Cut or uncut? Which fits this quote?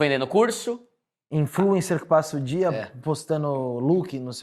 uncut